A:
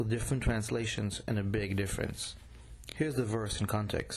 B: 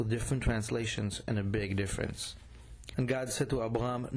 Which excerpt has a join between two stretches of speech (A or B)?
B